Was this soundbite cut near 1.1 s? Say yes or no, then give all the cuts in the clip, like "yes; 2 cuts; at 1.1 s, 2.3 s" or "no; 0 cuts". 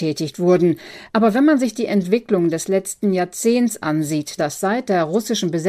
no; 1 cut; at 4.4 s